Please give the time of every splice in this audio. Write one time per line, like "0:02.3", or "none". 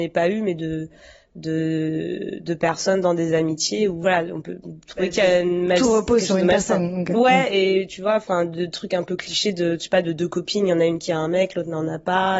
none